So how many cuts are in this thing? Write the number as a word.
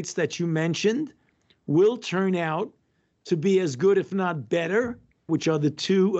one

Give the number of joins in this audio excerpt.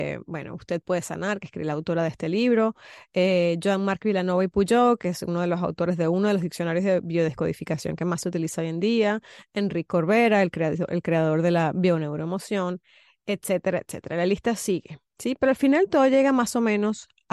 zero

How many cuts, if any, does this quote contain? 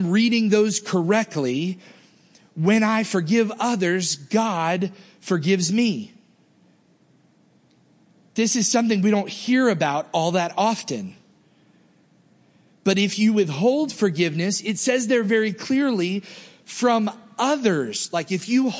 zero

